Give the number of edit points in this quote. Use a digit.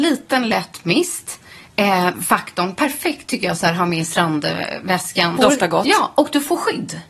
2